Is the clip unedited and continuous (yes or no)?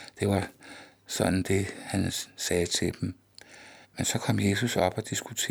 no